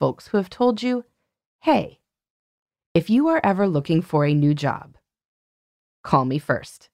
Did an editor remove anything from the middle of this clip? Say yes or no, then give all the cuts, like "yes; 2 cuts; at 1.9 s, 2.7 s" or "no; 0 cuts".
no; 0 cuts